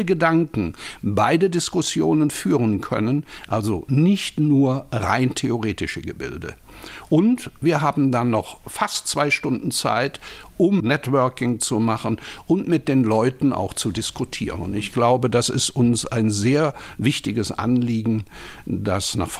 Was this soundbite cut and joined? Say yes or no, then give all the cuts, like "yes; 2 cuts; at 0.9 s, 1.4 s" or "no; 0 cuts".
no; 0 cuts